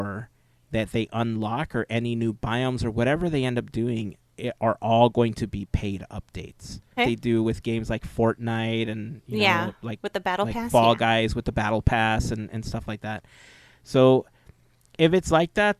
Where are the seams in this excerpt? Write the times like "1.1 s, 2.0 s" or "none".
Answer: 7.0 s